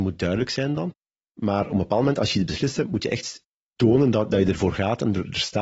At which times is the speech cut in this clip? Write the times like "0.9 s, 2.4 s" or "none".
none

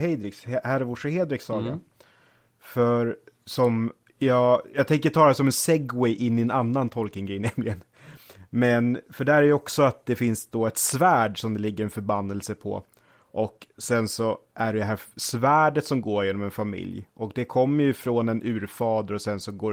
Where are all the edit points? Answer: none

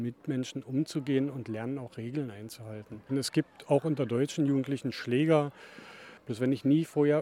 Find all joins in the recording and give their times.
3.1 s, 6.2 s

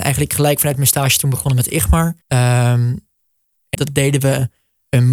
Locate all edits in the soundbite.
2.2 s, 3.7 s

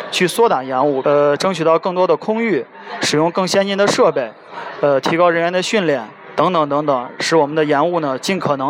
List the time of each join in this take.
1.0 s

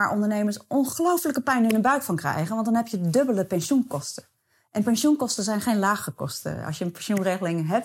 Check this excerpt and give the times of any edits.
none

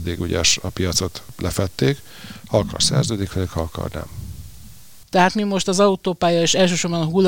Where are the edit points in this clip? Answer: 5.0 s

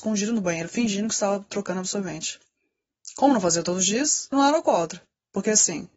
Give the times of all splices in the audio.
4.3 s

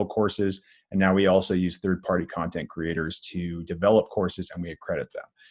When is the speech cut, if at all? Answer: none

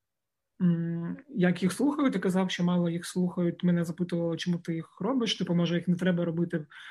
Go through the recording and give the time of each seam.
none

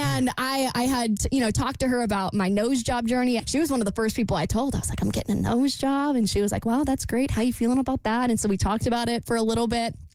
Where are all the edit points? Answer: 3.4 s

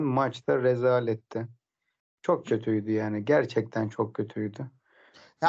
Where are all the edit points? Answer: none

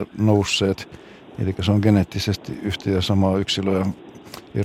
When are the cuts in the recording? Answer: none

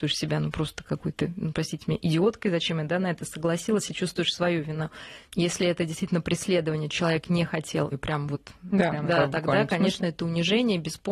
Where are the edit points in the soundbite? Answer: 7.9 s, 8.9 s

